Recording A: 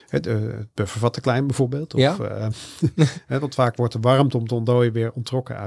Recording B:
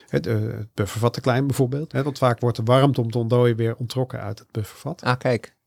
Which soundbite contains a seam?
B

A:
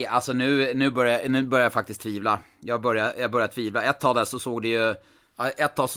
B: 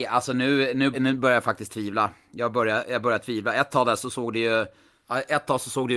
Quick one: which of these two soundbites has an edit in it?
B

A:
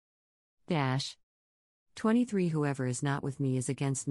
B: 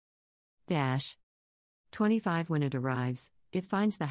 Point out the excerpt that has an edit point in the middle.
B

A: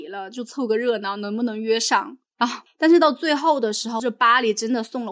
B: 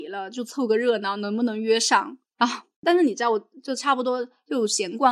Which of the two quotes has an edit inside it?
A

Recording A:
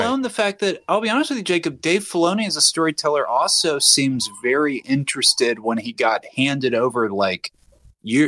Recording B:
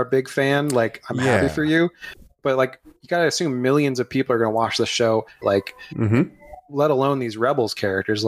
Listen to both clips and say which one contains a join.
B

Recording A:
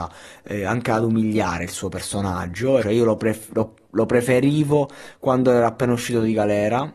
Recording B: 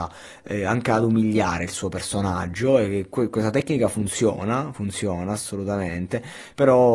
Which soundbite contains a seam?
A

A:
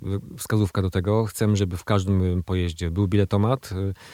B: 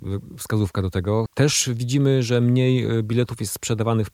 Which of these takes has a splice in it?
B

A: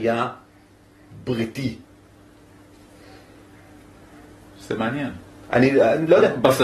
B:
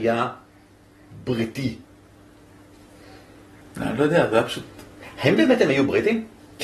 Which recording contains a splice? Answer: B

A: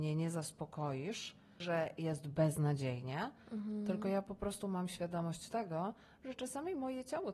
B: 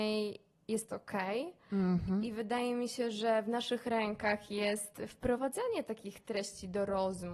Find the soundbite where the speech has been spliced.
A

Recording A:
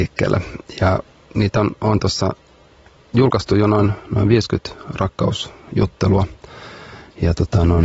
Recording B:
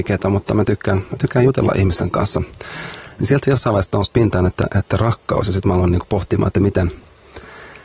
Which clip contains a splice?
B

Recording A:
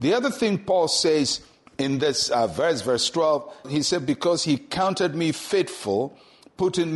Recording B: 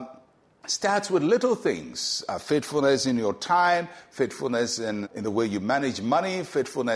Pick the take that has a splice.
B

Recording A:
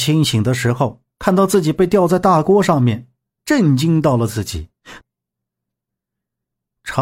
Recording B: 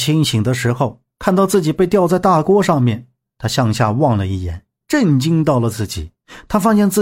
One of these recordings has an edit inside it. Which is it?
A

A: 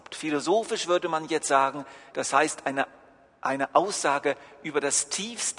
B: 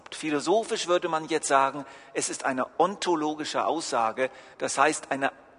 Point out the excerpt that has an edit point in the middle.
A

